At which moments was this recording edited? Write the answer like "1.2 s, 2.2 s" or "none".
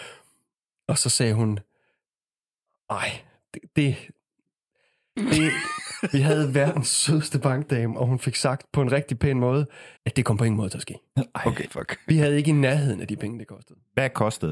10.0 s, 11.6 s